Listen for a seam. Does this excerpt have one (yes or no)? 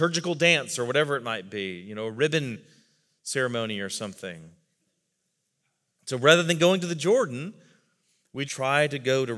yes